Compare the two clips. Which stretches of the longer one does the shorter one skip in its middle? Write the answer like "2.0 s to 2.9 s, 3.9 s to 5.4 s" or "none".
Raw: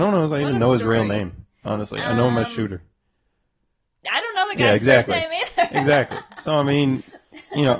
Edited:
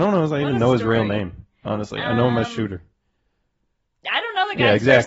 none